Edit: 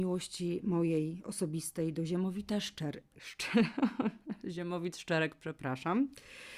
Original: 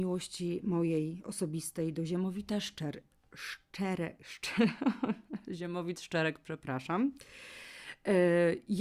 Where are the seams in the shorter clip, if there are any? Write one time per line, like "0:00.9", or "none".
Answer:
0:03.1